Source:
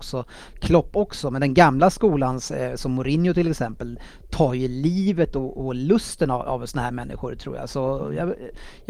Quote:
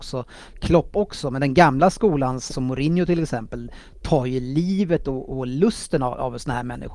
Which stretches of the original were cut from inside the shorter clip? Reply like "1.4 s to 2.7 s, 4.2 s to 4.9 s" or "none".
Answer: 2.5 s to 2.8 s